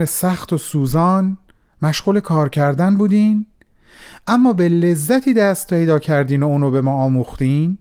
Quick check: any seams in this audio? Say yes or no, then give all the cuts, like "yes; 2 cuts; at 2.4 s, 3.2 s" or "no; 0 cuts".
no; 0 cuts